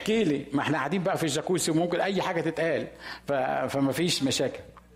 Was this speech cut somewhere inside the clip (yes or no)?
no